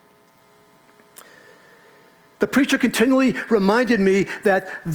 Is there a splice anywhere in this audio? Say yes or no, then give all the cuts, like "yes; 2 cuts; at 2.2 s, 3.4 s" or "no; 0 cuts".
yes; 1 cut; at 2.3 s